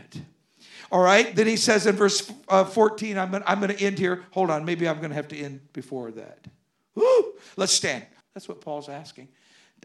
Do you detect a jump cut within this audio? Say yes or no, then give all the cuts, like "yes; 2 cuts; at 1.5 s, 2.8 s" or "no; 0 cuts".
yes; 1 cut; at 8.2 s